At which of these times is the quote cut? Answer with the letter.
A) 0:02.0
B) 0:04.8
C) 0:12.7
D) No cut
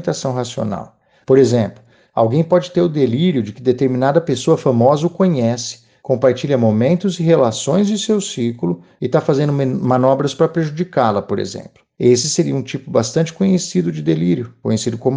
D